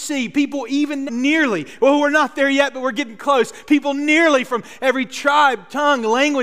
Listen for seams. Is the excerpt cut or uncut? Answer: cut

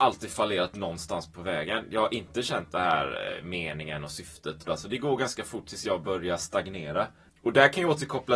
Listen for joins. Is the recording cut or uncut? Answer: cut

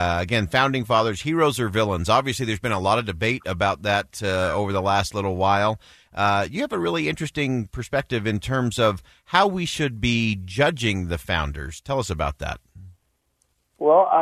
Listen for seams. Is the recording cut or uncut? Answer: uncut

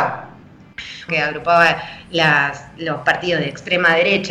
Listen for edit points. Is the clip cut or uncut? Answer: cut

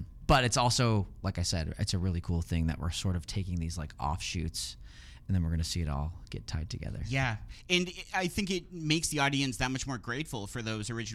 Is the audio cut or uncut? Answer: uncut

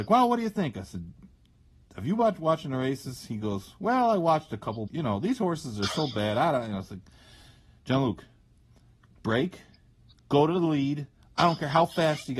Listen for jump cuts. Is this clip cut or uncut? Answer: cut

